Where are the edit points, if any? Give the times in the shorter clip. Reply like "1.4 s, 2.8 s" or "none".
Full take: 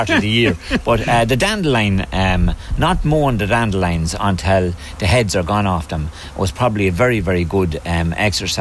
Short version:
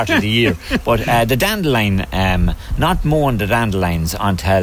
none